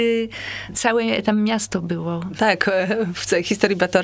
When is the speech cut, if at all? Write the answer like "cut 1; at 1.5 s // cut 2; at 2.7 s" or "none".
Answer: cut 1; at 2.4 s